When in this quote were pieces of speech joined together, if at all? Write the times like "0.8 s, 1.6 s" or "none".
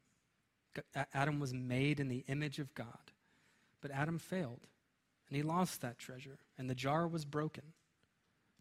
none